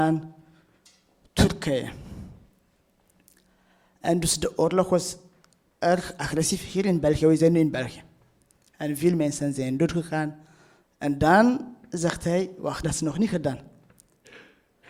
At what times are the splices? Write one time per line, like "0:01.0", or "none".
0:10.8
0:12.8

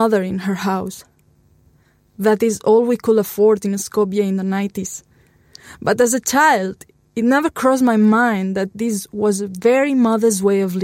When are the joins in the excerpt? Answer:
none

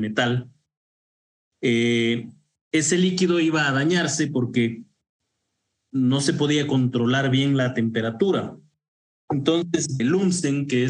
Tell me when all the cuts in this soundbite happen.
0:10.0

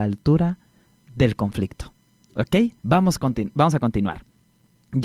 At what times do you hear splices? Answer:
0:02.8

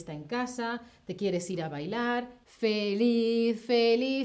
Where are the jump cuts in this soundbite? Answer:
0:02.4

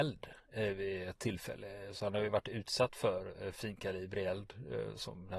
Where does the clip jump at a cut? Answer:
none

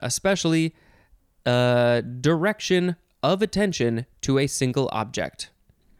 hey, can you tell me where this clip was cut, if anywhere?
none

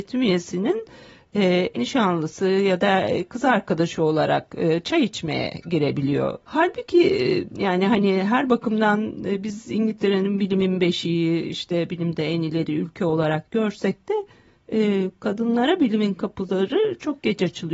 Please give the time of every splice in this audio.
0:01.7
0:06.4

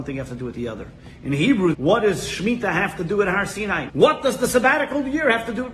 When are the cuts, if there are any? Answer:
0:01.7
0:03.9

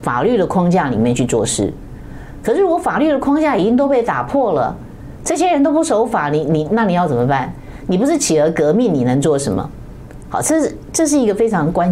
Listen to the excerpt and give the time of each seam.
none

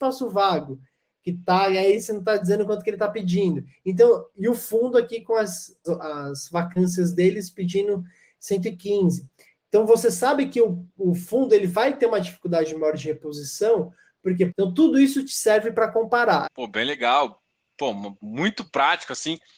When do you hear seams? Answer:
0:05.8
0:14.5
0:16.4

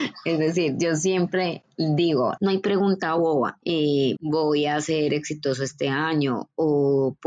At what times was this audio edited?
0:02.4
0:04.2

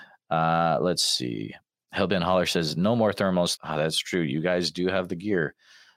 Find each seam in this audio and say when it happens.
0:03.6

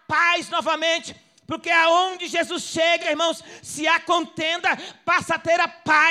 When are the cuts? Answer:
none

